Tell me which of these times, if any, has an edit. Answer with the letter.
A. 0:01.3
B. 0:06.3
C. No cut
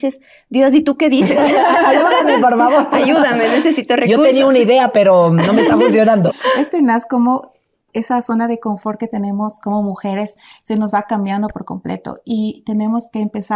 B